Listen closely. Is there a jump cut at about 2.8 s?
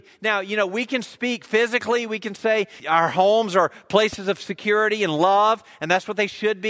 yes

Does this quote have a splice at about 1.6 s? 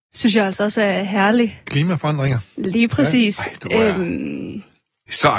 no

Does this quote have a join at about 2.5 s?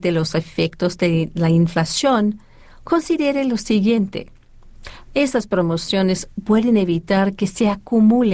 no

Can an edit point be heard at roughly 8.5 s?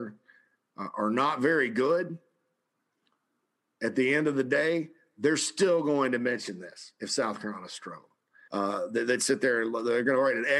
yes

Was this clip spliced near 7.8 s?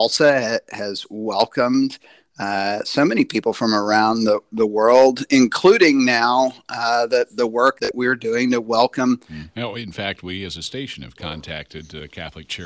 yes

